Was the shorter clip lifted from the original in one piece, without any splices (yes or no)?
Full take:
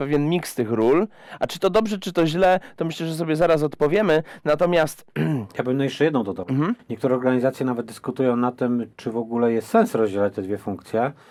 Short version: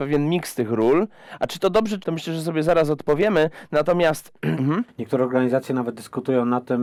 no